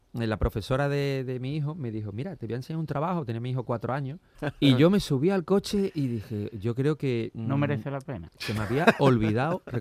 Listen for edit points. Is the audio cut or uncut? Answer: cut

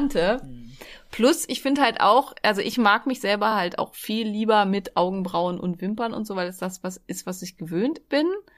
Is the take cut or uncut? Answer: uncut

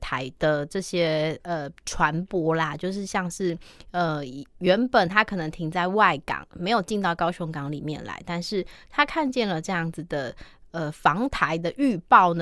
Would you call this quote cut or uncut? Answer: uncut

